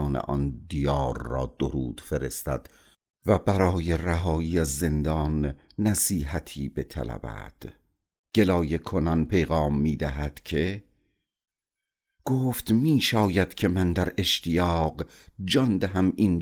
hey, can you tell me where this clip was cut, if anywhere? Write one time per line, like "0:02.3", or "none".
none